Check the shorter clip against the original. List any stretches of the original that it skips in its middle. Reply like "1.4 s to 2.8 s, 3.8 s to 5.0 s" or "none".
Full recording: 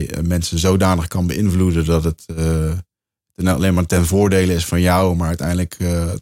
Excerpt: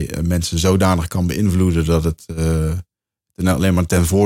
none